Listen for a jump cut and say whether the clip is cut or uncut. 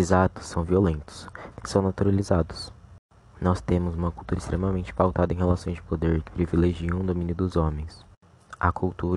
cut